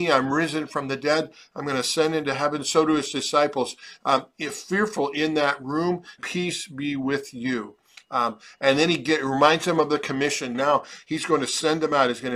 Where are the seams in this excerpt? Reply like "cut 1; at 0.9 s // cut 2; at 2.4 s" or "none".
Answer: cut 1; at 6.2 s // cut 2; at 10.5 s